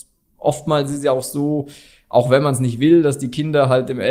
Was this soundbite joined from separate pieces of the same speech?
no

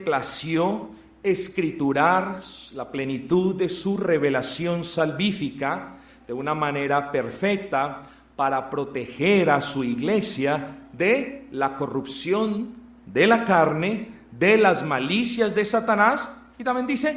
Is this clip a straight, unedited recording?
yes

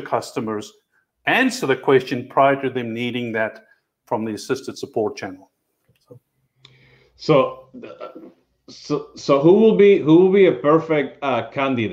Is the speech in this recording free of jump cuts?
yes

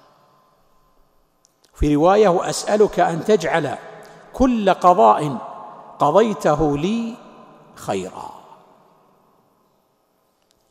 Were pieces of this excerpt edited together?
no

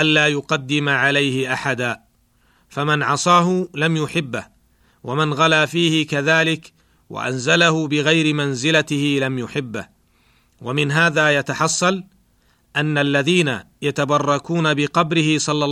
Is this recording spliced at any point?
no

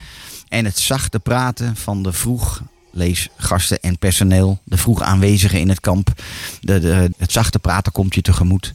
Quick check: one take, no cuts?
no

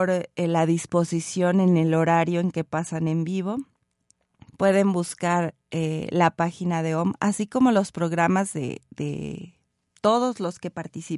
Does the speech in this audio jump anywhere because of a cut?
yes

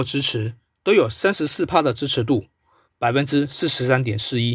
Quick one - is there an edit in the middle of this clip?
yes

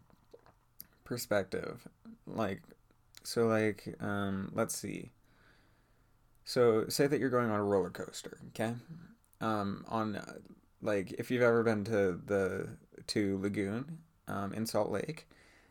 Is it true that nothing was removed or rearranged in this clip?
yes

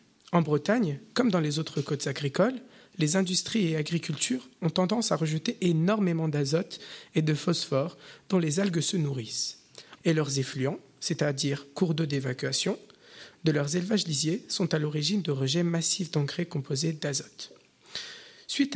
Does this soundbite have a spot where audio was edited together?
yes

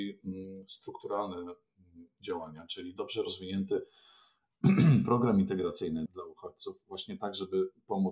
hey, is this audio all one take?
no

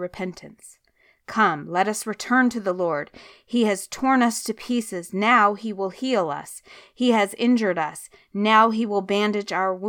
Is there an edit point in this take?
no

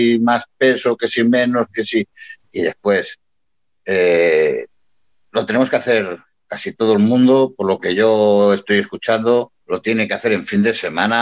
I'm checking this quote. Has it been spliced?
yes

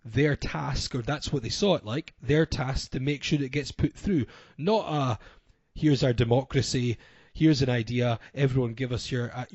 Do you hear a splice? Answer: no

